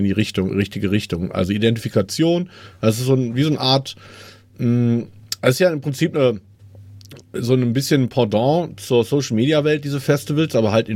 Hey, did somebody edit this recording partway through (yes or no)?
no